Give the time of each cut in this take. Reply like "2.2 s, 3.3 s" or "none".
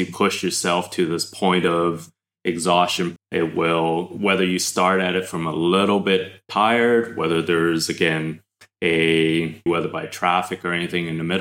3.2 s, 9.7 s

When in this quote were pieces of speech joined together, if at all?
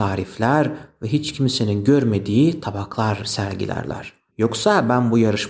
4.3 s

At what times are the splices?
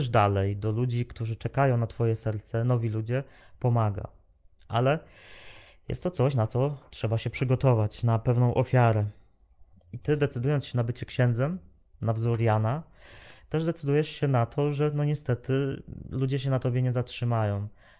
9.7 s

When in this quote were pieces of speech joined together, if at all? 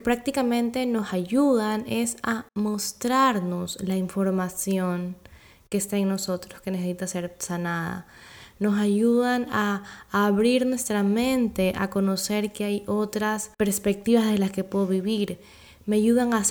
2.5 s, 13.5 s

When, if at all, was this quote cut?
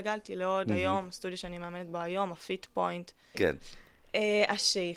3.3 s

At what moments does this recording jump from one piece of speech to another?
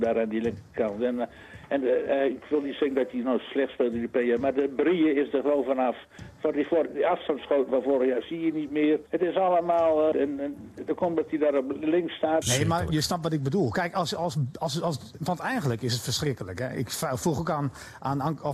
9.1 s, 10.1 s, 12.4 s

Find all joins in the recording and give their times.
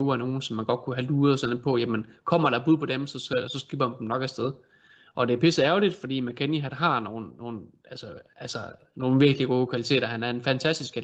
none

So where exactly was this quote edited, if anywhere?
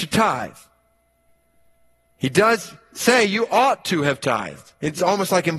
none

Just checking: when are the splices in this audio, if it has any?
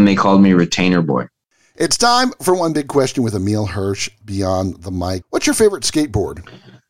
5.2 s

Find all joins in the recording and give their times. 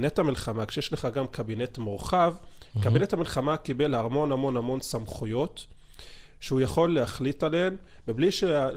none

